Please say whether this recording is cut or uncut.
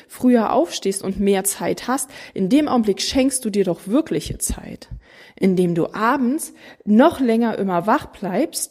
uncut